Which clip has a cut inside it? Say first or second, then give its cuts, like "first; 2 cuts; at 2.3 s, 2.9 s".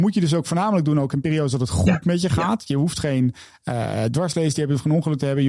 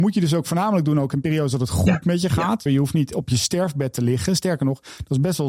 second; 1 cut; at 2.7 s